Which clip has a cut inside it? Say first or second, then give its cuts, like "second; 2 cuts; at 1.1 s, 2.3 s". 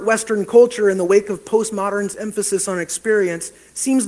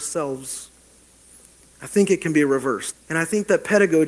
second; 1 cut; at 2.9 s